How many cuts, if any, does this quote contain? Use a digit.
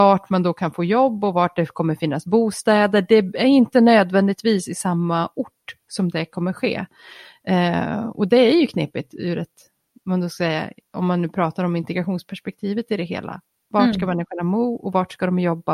0